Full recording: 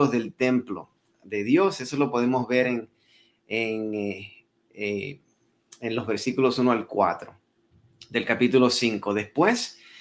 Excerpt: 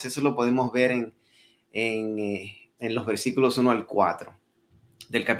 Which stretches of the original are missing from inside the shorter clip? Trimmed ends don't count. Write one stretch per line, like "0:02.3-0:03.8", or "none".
0:04.5-0:05.8

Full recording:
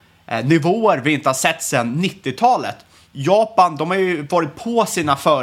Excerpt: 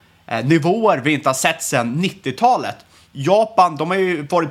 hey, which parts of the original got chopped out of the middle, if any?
none

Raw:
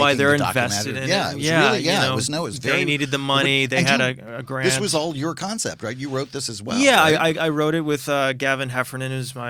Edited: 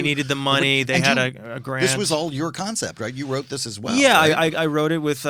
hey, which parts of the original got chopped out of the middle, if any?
none

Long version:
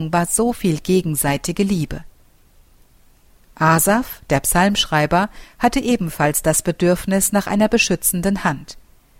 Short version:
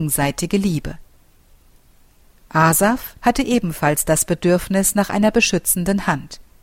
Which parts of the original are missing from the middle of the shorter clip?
0:04.2-0:05.6

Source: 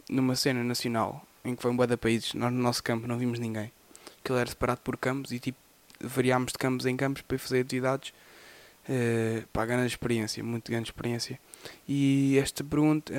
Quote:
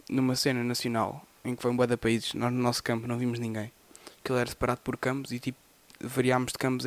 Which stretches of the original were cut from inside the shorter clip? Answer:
none

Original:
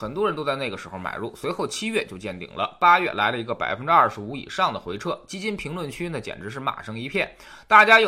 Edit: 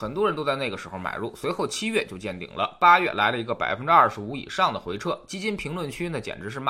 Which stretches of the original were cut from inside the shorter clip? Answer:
none

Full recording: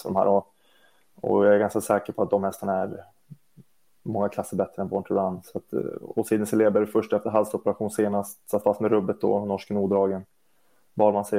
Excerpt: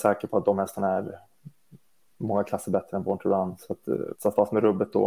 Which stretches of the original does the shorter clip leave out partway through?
0:06.0-0:08.4

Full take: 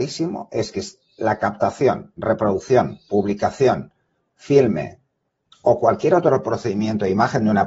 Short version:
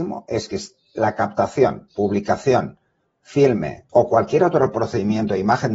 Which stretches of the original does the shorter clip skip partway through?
0:02.1-0:03.0
0:05.0-0:05.6

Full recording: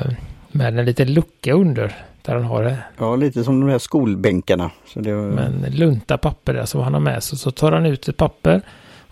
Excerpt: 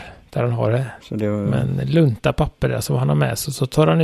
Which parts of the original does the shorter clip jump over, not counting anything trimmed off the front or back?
0:02.9-0:04.8

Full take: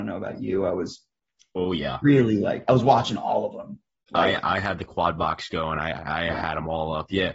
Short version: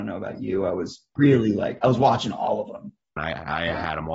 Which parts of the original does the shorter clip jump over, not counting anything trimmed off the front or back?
0:01.2-0:02.0
0:04.0-0:05.8

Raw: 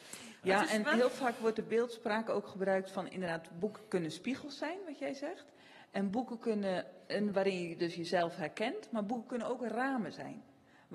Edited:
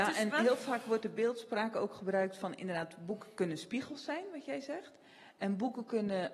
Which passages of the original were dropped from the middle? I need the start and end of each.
none

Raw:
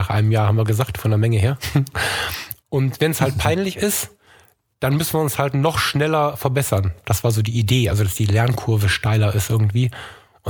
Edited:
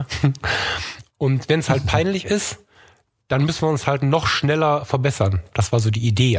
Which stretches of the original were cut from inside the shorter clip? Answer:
none

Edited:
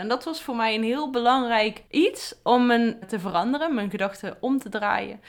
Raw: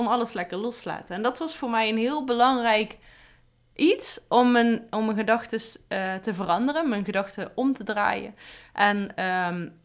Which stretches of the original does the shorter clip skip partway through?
0:03.0-0:03.7
0:04.9-0:06.2

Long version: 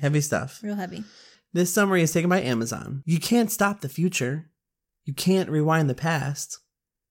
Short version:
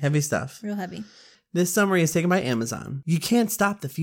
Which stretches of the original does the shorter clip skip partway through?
none

